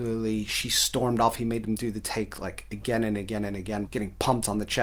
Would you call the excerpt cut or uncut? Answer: cut